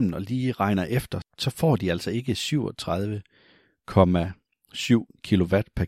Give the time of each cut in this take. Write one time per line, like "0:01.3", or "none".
0:01.2